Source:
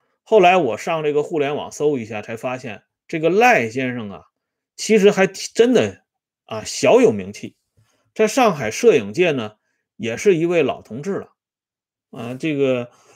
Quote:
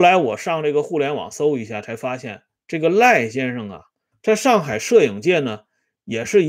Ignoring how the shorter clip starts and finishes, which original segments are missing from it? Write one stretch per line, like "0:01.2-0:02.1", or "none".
0:04.5-0:08.0